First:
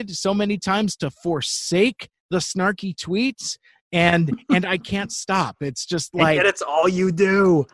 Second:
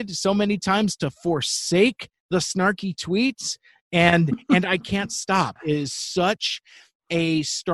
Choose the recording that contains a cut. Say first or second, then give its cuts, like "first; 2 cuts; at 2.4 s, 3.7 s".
second; 1 cut; at 5.6 s